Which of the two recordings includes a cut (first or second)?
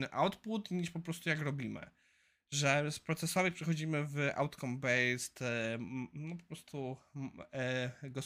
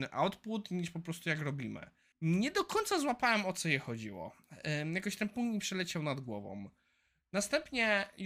second